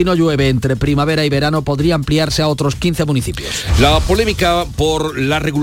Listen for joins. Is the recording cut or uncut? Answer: uncut